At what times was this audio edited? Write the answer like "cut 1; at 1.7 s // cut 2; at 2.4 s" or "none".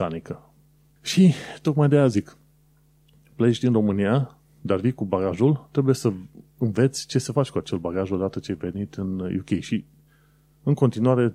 cut 1; at 1.0 s

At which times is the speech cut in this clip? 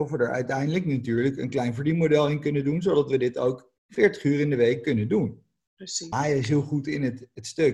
cut 1; at 3.8 s // cut 2; at 6.1 s

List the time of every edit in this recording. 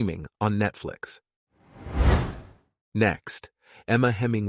none

